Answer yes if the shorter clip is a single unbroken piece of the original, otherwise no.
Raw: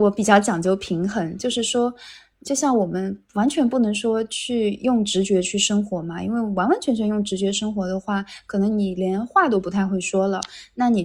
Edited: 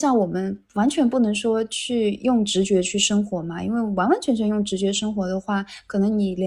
yes